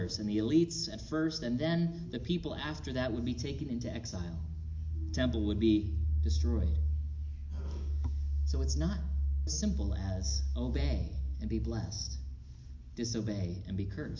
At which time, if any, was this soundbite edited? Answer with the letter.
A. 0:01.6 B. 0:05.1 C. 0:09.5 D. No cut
C